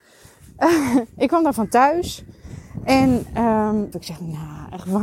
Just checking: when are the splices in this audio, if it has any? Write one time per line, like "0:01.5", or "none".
0:03.9